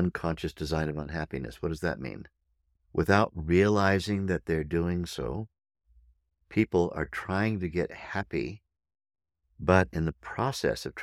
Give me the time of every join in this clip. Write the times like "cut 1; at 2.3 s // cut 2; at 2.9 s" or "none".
none